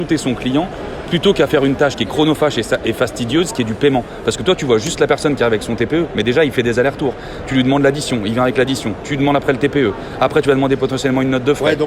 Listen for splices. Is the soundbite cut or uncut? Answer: uncut